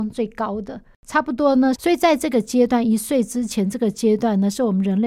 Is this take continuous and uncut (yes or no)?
no